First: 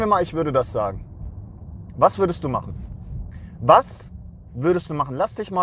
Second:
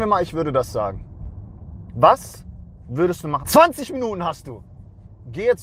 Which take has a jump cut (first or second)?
second